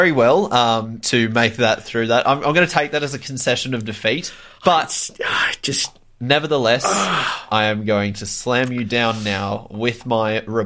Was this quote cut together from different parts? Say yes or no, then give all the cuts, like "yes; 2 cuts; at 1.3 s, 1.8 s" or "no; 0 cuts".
no; 0 cuts